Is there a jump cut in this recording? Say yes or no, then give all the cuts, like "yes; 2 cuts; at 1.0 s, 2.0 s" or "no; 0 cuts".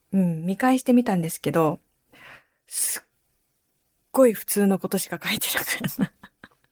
no; 0 cuts